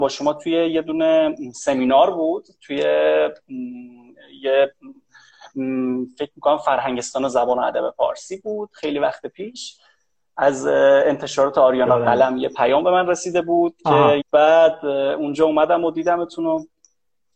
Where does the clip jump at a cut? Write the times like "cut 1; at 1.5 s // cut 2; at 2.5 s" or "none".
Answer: cut 1; at 14.2 s